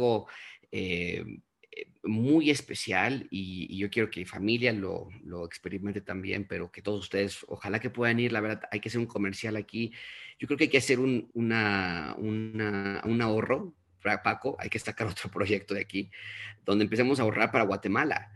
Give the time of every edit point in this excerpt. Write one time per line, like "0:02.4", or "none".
0:11.3